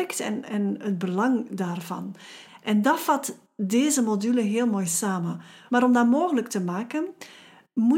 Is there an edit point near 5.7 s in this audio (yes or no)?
yes